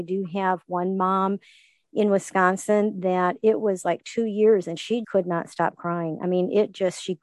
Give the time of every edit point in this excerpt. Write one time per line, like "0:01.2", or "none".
0:05.0